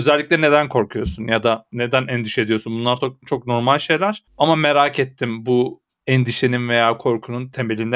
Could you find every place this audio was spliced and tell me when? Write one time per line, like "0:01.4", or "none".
none